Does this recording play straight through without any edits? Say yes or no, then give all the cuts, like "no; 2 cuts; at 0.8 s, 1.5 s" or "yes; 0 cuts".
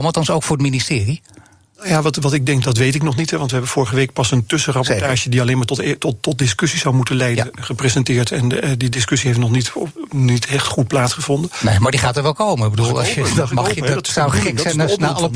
no; 1 cut; at 2.6 s